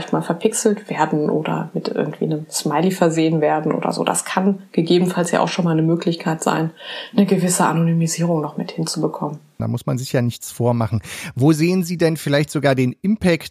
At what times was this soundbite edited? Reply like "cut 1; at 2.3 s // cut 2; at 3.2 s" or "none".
cut 1; at 9.6 s